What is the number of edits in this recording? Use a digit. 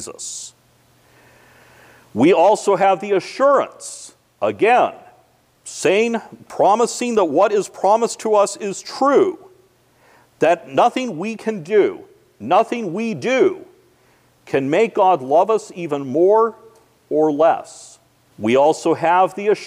1